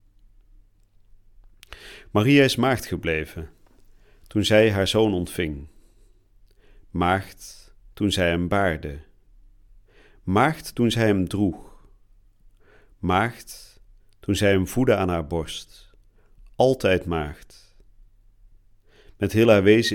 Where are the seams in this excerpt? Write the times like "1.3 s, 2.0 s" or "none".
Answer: none